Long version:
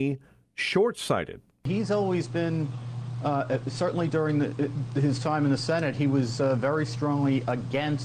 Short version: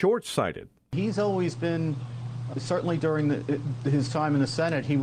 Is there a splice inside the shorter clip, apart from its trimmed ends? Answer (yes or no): yes